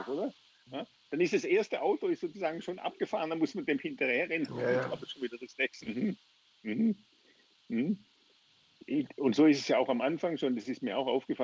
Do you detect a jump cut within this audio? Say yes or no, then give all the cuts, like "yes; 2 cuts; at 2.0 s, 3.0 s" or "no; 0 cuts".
yes; 1 cut; at 5.8 s